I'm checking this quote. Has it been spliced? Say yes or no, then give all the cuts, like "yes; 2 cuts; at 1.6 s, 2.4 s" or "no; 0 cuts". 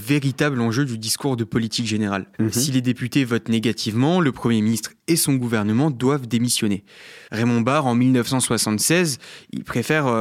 yes; 2 cuts; at 2.3 s, 7.3 s